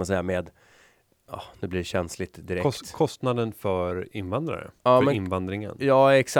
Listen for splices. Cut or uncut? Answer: uncut